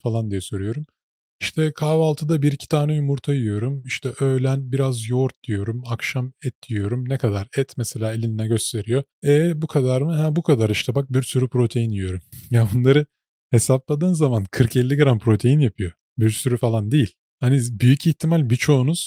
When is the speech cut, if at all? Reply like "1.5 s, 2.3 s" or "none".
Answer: 9.1 s